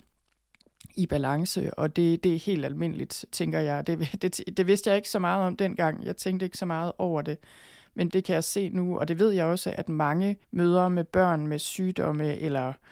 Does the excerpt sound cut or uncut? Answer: cut